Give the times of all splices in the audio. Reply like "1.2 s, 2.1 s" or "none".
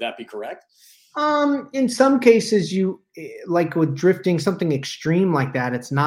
none

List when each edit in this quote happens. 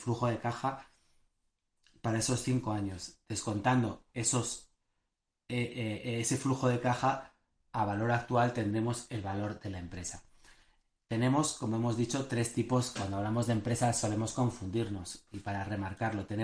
none

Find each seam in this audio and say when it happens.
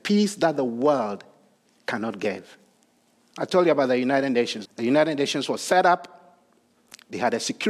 3.2 s, 4.6 s

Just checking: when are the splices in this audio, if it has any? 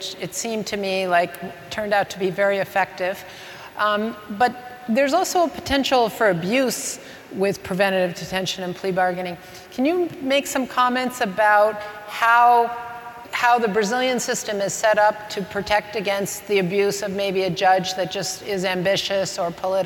13.2 s

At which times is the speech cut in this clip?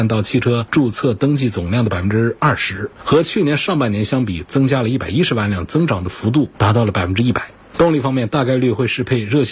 7.7 s

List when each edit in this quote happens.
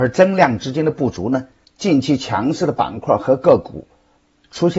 1.6 s

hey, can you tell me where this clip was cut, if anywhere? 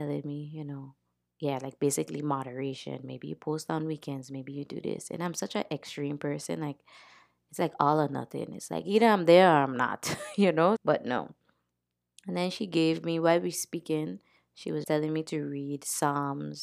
10.8 s, 14.8 s

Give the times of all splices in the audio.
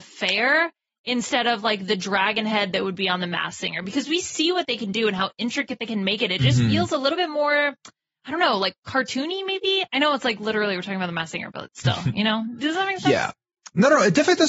none

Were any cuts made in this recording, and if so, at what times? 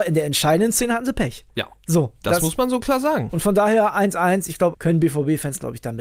4.7 s

